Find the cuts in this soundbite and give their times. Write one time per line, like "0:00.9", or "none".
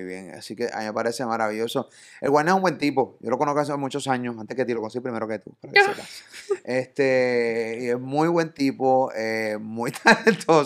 none